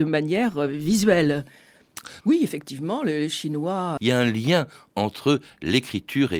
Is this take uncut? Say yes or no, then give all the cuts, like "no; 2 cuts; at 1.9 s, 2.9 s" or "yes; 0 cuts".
no; 2 cuts; at 2.2 s, 4.0 s